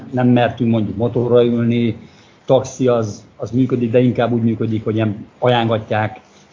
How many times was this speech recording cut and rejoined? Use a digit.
0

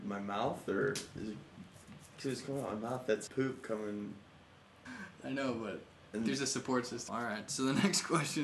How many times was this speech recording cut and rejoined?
3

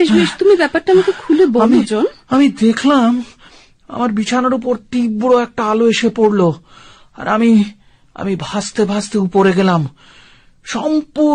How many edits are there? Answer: 0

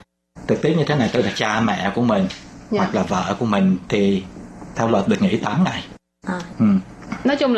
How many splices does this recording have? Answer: 2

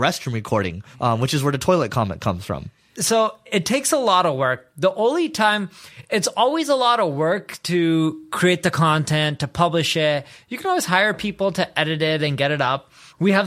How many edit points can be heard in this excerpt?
0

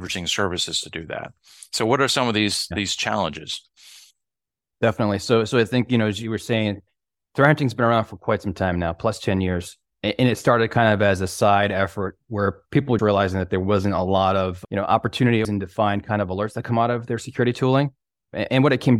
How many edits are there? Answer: 2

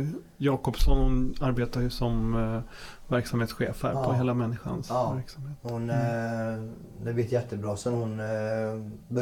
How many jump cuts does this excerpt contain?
0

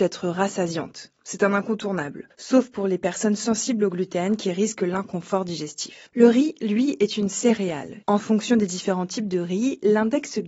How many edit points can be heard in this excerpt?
1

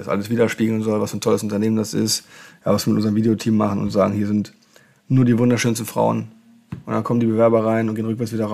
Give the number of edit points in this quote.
0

